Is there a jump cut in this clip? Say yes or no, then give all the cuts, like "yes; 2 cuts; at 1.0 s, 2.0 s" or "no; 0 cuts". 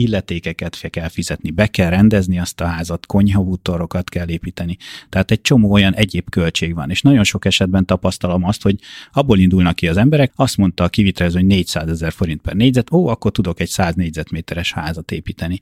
yes; 1 cut; at 10.3 s